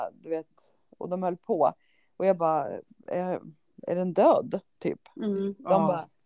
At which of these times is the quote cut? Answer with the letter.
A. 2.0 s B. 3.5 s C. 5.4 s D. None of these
D